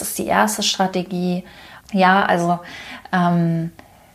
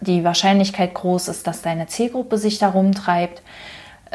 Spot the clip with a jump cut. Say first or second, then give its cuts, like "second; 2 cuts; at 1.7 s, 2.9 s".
first; 1 cut; at 1.8 s